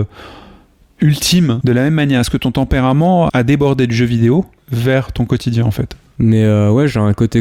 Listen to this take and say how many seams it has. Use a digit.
1